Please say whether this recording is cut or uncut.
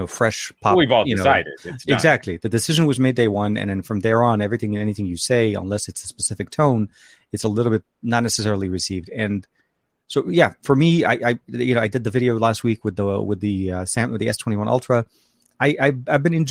uncut